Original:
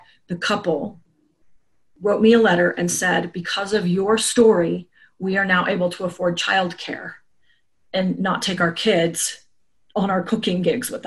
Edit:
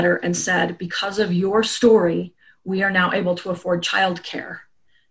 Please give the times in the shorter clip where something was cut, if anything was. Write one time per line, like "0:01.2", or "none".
none